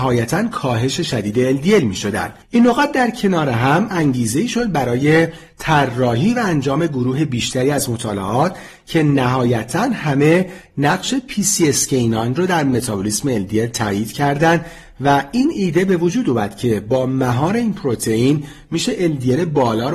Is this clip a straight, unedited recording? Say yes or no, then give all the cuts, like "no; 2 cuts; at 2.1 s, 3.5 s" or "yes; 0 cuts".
no; 1 cut; at 2.4 s